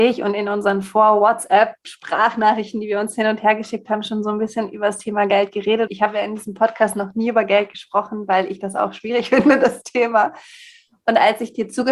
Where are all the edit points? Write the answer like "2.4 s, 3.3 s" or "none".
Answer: 5.9 s